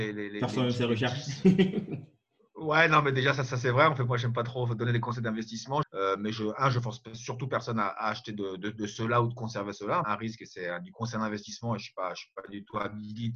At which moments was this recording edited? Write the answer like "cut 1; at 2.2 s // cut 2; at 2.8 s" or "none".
cut 1; at 5.8 s // cut 2; at 10.0 s